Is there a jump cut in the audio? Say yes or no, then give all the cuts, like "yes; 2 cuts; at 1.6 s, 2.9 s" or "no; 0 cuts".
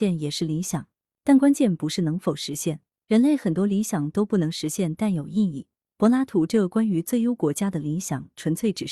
no; 0 cuts